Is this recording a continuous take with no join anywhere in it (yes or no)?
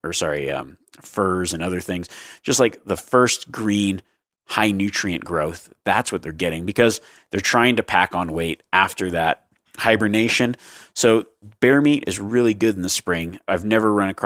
yes